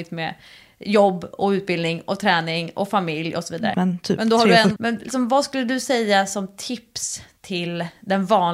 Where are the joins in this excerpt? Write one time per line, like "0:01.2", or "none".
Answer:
0:03.7
0:04.8